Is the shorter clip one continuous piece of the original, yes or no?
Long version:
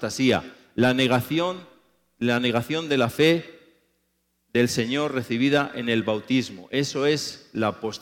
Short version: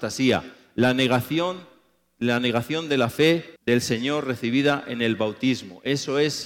no